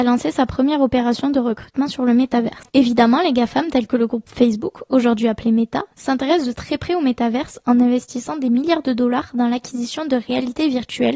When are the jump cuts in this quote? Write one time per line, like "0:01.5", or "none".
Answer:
0:05.9